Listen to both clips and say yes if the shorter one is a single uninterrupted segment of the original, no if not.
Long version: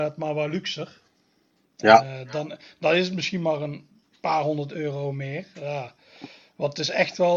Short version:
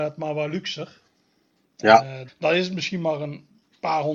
no